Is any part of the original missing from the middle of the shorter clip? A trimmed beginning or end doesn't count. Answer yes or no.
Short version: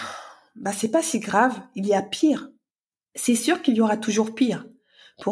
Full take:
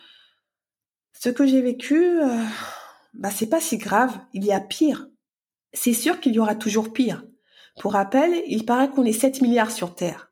no